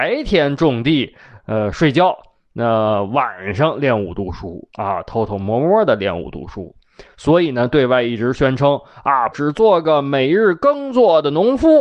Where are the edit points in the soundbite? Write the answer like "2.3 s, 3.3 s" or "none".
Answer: 9.3 s